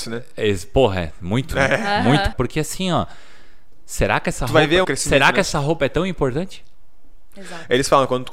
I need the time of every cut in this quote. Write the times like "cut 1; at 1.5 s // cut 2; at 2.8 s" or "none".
cut 1; at 2.3 s // cut 2; at 4.8 s